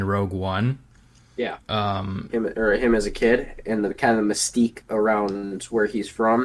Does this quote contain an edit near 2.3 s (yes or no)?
yes